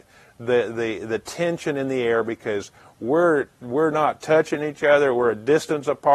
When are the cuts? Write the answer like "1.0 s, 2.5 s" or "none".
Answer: none